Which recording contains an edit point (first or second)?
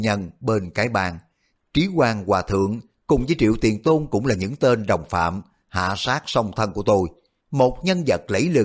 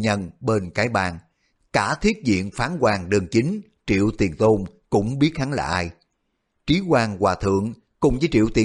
first